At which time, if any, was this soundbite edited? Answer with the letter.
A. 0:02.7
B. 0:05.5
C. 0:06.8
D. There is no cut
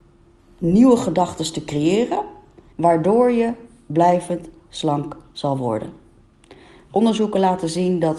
A